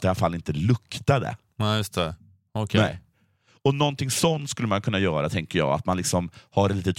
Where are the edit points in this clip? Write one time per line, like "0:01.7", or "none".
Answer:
none